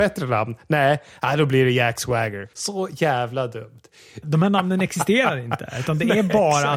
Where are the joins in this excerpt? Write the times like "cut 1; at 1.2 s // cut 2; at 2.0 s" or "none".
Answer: cut 1; at 2.5 s // cut 2; at 4.2 s